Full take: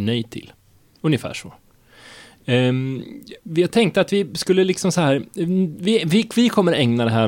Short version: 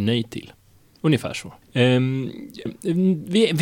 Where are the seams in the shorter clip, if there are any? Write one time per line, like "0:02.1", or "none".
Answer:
0:01.6
0:02.7